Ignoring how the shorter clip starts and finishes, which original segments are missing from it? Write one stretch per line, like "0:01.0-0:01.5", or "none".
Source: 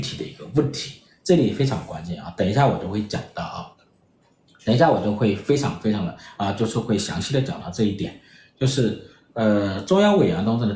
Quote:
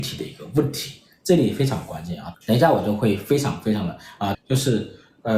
0:02.3-0:04.5
0:06.5-0:08.5